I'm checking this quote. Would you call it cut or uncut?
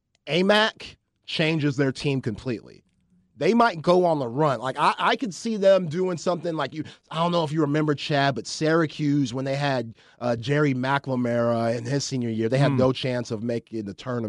uncut